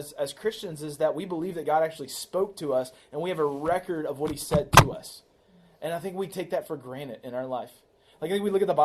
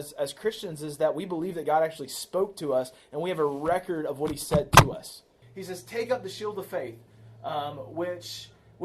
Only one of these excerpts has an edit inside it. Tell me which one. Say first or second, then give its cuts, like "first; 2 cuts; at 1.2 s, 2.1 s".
second; 1 cut; at 5.4 s